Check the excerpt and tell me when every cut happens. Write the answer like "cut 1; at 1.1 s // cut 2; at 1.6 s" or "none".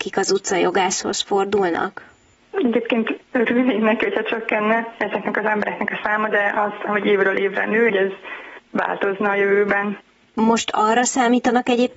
cut 1; at 6.9 s // cut 2; at 7.9 s // cut 3; at 10.3 s